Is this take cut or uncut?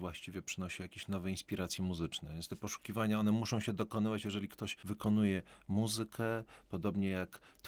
uncut